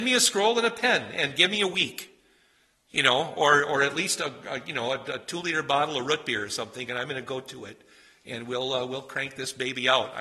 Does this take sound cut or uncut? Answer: uncut